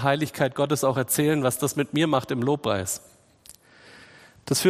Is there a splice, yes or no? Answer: no